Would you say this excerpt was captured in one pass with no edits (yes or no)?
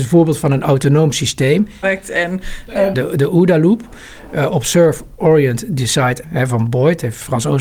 no